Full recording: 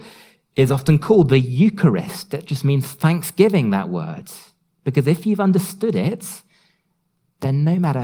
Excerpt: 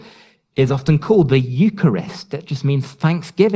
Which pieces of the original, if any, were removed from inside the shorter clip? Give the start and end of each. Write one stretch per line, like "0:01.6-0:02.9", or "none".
none